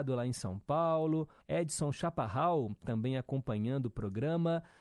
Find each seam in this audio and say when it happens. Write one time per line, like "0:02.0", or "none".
0:01.4
0:02.8